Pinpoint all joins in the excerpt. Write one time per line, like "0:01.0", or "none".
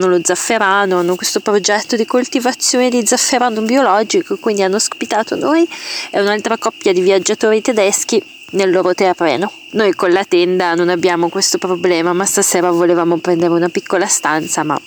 0:09.7

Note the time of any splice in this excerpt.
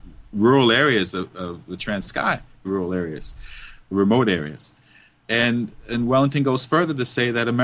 0:02.6

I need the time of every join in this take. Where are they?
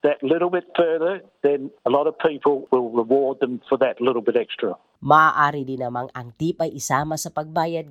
0:01.3
0:05.0

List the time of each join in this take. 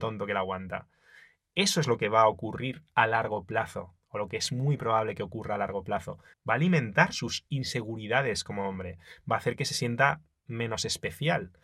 0:06.3

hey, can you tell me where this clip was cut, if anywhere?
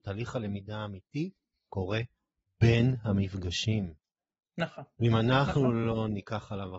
none

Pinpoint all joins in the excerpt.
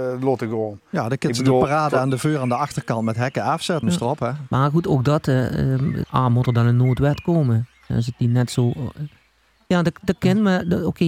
0:03.8
0:06.0
0:09.7

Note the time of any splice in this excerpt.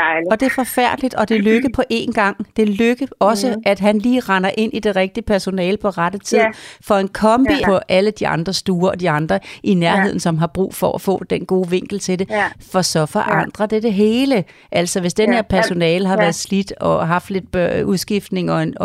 0:07.6

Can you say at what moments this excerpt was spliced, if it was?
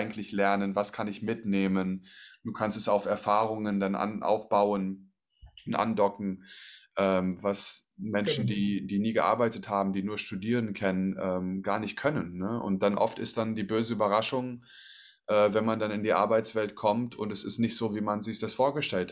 none

